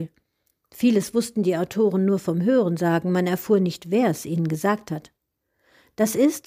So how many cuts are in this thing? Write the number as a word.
zero